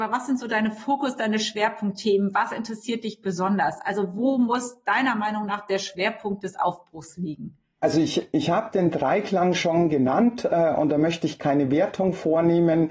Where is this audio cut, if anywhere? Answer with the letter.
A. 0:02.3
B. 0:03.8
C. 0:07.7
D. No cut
D